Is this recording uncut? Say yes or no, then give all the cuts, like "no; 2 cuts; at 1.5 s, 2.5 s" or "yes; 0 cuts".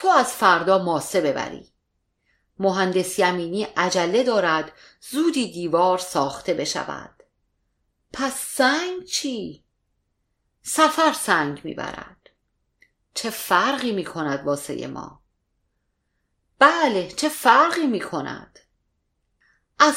yes; 0 cuts